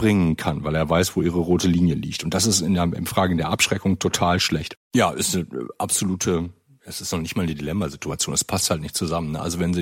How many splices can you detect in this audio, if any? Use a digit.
1